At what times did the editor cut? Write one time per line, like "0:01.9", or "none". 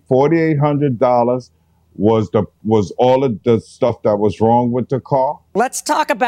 none

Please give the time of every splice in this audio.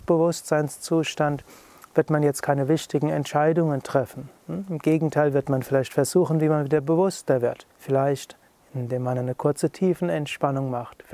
0:07.7

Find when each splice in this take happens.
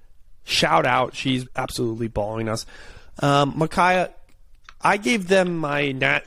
0:01.5

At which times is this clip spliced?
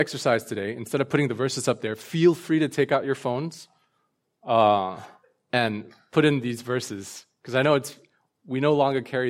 none

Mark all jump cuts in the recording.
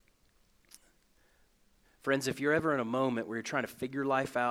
0:01.8

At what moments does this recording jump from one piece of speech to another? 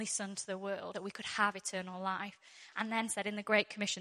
0:00.9

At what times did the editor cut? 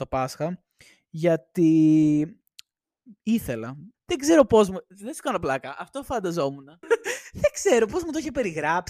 0:03.9
0:06.8

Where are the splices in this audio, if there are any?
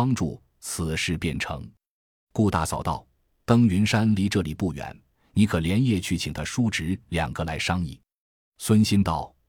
none

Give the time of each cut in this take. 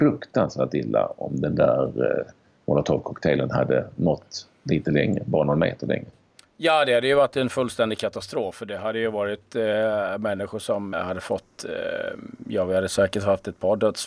0:10.9

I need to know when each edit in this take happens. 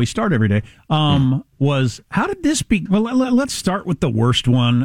0:02.9

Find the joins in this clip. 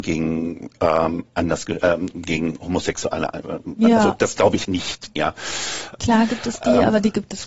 0:04.6
0:06.0

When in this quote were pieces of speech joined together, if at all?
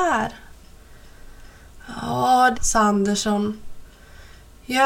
0:02.5

